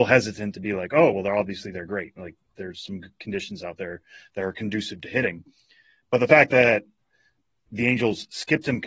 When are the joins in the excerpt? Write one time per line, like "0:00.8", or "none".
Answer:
none